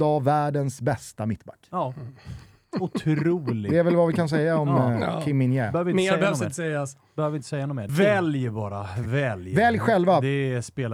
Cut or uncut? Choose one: cut